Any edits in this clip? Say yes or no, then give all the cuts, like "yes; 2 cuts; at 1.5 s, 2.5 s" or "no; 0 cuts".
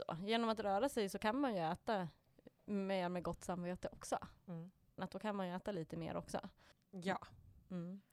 yes; 2 cuts; at 5.0 s, 6.7 s